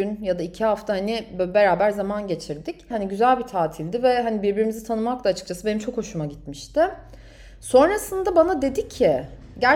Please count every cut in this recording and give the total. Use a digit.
1